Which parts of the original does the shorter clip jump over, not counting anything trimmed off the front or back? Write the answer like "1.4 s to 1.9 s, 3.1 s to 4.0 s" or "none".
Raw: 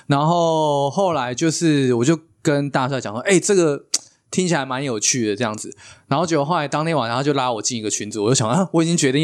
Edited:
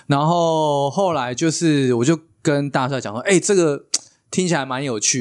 none